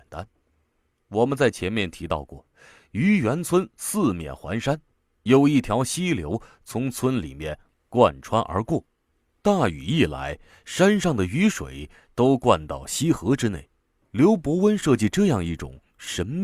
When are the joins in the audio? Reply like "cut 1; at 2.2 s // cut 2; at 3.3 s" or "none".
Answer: cut 1; at 14.0 s